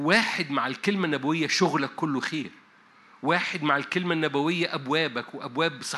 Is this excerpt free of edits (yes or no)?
yes